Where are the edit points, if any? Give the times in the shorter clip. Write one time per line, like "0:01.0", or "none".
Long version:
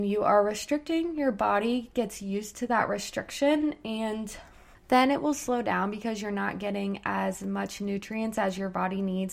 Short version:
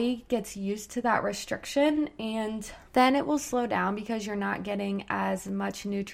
0:02.9